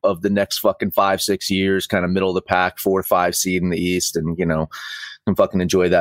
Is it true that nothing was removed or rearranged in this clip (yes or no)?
yes